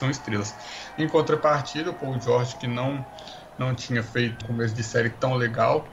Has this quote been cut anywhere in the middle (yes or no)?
yes